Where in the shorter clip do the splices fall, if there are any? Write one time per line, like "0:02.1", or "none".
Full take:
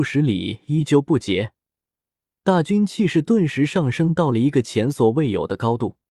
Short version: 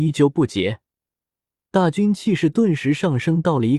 none